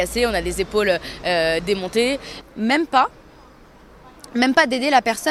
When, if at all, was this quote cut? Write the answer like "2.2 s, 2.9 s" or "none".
2.4 s

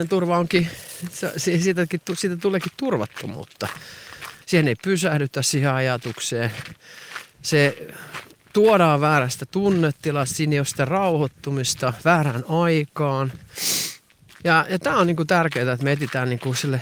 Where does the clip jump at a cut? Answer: 4.4 s, 14.4 s

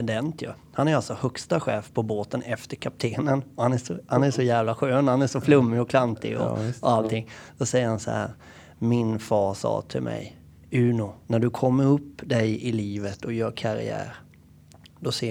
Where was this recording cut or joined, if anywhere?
11.2 s

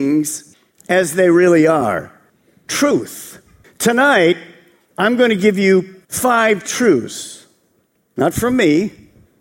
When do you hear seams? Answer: 3.6 s, 6.0 s

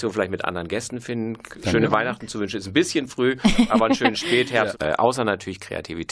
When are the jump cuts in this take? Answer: 1.5 s, 4.7 s

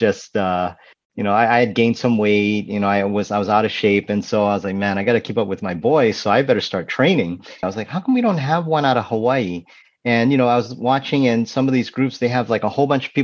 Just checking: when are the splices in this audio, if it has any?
7.6 s

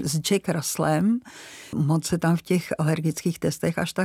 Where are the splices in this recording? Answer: 1.7 s

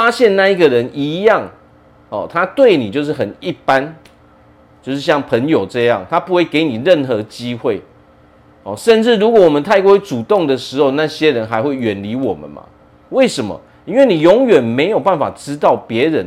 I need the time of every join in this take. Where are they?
13.1 s

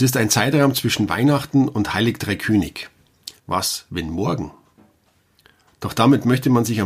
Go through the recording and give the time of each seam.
3.4 s

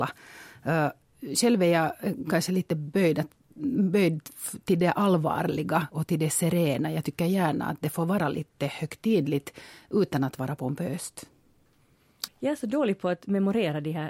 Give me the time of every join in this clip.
12.3 s

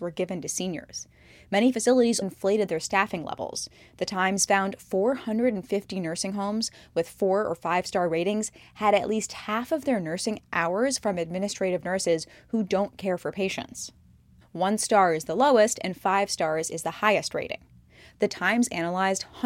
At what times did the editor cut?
2.2 s, 14.4 s

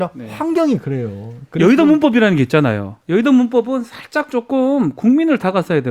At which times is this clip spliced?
none

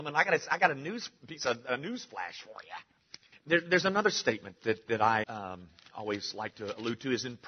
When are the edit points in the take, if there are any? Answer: 3.3 s, 5.2 s

